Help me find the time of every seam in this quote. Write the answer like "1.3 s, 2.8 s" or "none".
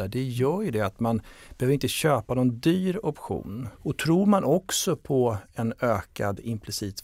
3.7 s